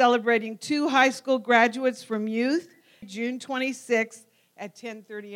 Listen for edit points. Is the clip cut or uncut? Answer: cut